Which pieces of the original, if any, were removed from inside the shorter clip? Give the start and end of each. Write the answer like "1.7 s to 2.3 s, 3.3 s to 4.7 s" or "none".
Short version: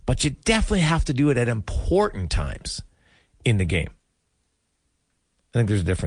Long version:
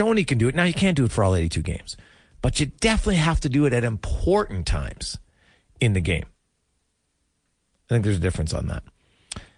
none